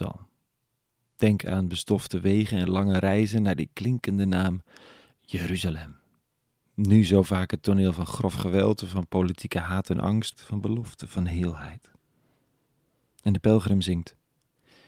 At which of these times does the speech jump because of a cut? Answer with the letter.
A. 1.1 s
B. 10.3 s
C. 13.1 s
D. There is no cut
B